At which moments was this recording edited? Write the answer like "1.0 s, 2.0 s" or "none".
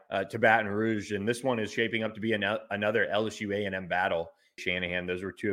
4.6 s